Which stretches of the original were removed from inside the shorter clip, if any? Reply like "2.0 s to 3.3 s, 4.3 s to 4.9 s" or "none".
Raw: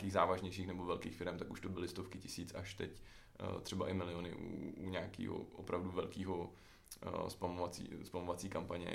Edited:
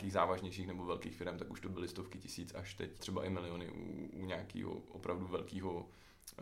3.0 s to 3.6 s